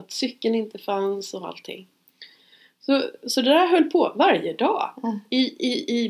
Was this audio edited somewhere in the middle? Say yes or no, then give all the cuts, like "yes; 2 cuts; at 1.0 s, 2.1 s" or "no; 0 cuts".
no; 0 cuts